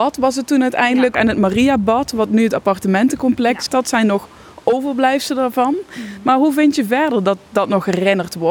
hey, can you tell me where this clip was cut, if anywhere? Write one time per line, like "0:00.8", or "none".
0:01.1
0:03.7